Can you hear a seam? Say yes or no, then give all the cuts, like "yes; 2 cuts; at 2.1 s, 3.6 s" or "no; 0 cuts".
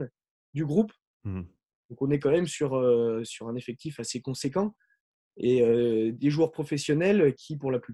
yes; 1 cut; at 1.7 s